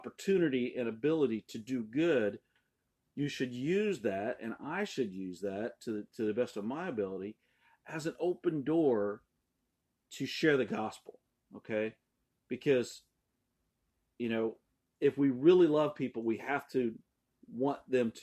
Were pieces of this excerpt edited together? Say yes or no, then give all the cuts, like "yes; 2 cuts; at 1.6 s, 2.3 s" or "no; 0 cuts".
no; 0 cuts